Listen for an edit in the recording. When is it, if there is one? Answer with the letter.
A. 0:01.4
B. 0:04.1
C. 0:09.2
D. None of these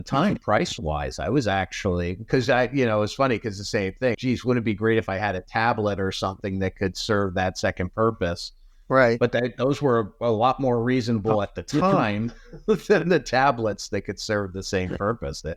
B